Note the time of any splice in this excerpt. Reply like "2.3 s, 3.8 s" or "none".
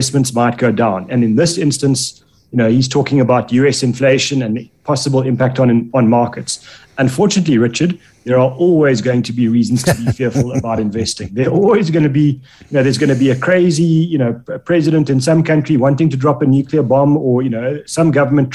none